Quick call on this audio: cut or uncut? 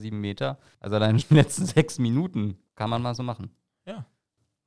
cut